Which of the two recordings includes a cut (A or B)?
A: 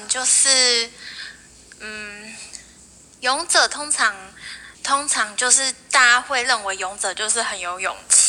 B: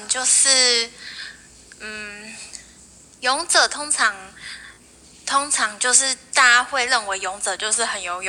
A